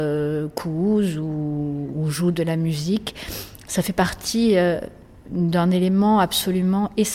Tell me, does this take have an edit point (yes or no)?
no